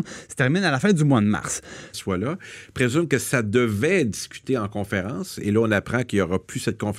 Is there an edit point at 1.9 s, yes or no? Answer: yes